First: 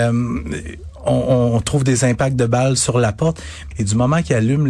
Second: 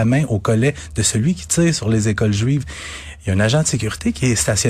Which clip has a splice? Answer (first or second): first